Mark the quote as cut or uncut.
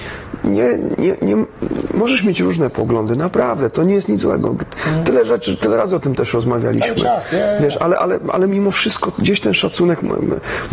uncut